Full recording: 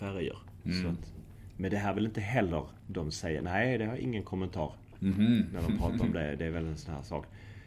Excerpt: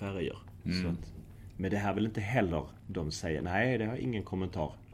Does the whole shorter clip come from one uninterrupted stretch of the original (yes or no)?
yes